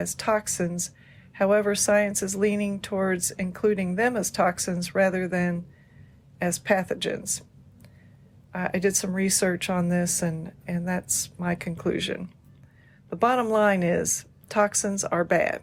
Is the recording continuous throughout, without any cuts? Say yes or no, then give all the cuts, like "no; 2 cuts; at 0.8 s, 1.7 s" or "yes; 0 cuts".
yes; 0 cuts